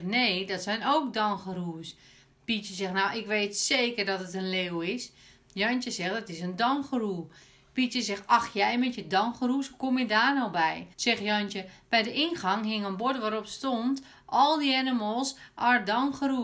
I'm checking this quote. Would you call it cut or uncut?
cut